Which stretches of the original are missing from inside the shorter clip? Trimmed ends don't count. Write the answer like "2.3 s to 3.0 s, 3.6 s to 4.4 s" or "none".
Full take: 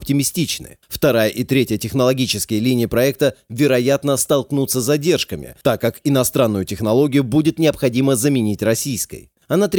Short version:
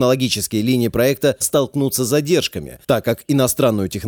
3.4 s to 4.2 s